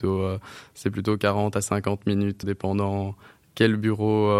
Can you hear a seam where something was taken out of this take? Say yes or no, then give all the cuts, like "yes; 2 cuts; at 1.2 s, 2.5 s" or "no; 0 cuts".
yes; 1 cut; at 2.4 s